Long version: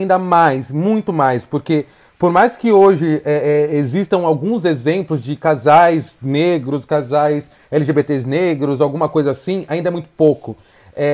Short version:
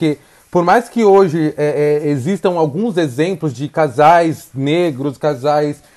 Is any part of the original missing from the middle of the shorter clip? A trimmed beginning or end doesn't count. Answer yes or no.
no